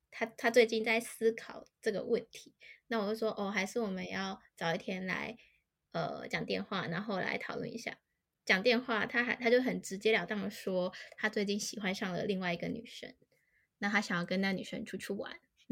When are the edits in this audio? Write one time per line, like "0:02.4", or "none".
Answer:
none